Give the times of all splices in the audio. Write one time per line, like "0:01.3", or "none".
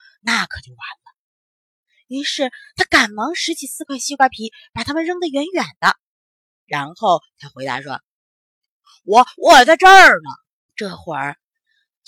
0:10.7